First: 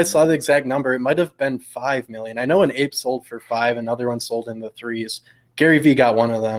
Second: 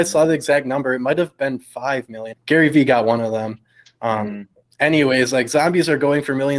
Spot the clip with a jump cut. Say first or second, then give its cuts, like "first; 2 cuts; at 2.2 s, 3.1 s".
second; 1 cut; at 2.3 s